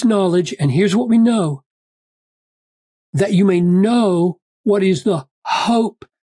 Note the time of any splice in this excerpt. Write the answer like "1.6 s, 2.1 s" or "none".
none